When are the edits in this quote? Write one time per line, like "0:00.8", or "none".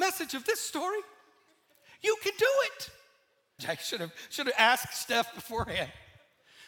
0:03.6